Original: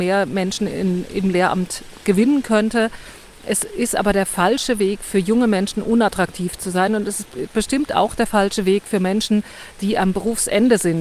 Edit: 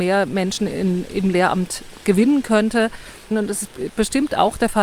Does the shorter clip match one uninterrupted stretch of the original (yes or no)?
no